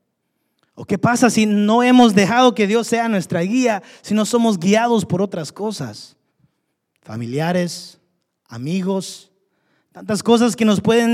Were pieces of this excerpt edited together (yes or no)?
no